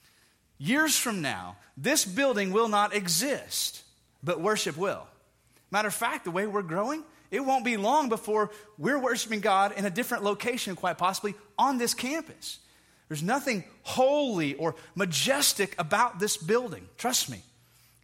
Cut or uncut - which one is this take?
uncut